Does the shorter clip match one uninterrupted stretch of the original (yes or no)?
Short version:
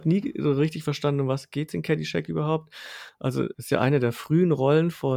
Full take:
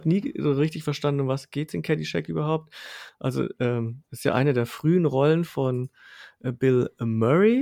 no